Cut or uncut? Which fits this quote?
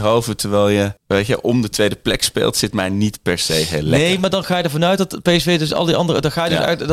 cut